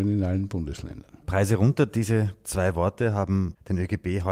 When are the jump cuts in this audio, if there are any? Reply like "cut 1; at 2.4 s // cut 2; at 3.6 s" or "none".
cut 1; at 1.2 s